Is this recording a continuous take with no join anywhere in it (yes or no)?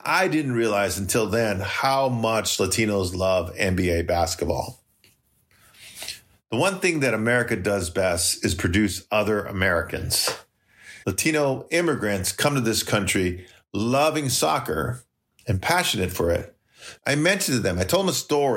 no